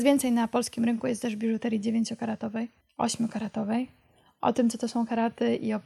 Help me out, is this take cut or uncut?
uncut